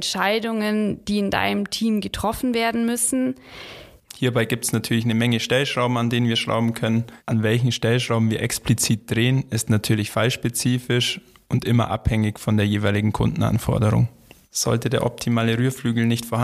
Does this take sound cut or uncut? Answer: cut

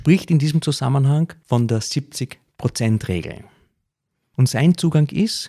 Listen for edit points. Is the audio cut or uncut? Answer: uncut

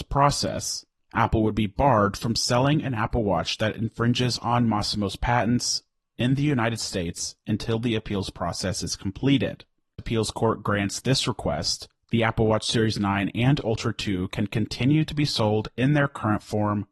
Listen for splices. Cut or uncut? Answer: cut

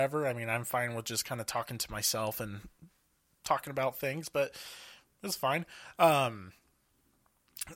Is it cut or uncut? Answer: uncut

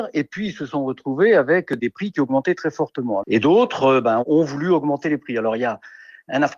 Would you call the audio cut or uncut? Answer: cut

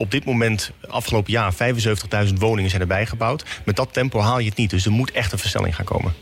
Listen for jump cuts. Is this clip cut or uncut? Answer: uncut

